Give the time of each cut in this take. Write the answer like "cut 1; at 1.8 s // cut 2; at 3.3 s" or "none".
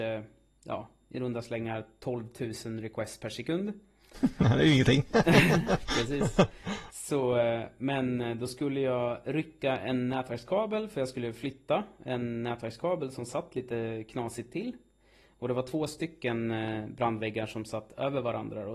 none